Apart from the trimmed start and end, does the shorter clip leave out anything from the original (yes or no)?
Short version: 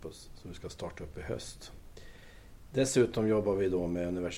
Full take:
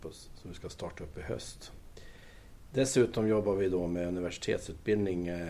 no